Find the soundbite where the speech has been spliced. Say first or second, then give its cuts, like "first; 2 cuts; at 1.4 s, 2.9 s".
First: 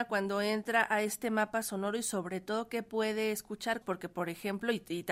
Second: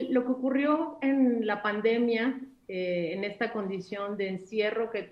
first; 1 cut; at 3.8 s